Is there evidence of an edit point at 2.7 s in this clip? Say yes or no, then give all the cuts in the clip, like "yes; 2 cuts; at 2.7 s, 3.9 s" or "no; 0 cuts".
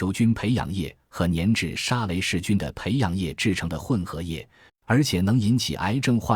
no; 1 cut; at 4.7 s